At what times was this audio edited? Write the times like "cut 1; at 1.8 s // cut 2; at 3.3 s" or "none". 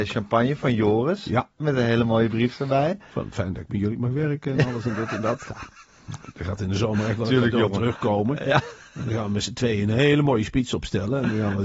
cut 1; at 1.6 s